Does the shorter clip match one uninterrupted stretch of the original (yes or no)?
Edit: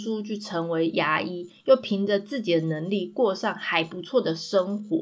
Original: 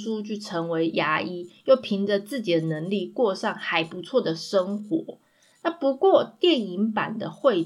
yes